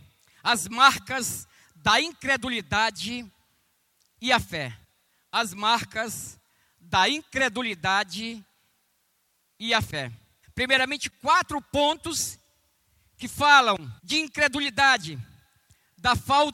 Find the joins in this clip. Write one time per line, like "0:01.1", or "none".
0:10.4
0:14.0